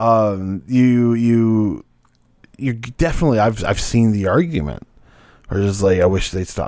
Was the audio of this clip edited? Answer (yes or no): no